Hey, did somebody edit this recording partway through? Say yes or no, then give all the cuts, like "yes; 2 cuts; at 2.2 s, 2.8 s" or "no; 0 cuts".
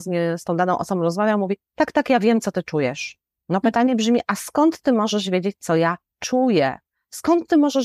no; 0 cuts